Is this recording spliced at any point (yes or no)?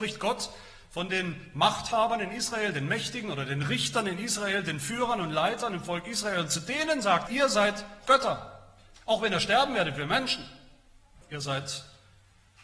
yes